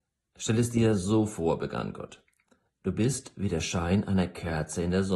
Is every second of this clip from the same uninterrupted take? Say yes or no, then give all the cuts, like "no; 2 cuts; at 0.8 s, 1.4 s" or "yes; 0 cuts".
yes; 0 cuts